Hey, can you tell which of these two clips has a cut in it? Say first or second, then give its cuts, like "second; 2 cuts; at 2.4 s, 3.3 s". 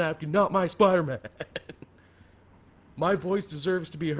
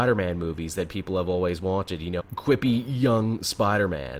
second; 1 cut; at 2.2 s